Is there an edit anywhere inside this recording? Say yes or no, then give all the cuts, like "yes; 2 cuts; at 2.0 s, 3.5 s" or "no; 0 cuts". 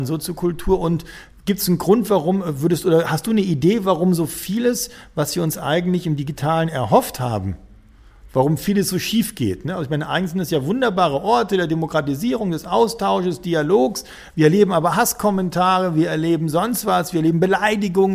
no; 0 cuts